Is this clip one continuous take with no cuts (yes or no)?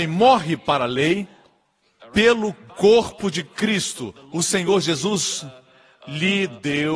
yes